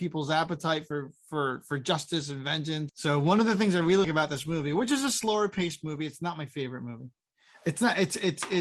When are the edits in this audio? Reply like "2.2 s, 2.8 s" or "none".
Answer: 2.9 s, 4.0 s